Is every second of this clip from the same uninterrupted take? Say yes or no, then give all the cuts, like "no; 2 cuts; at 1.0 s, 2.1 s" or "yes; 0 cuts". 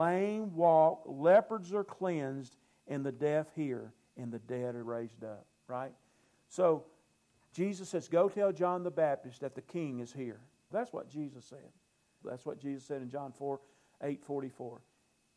no; 3 cuts; at 7.5 s, 10.7 s, 12.2 s